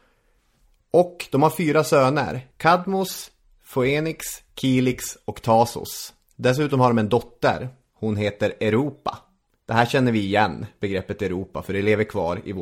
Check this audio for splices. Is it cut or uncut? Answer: uncut